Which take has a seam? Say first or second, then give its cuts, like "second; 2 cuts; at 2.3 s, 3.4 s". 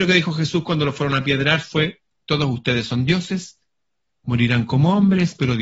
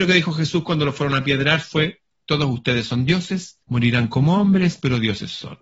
second; 1 cut; at 3.6 s